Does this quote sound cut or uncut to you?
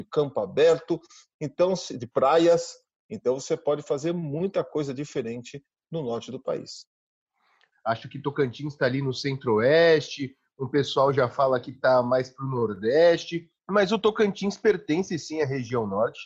cut